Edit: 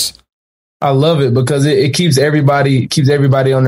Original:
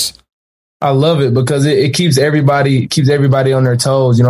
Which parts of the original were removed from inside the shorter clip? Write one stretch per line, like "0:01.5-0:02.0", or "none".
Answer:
none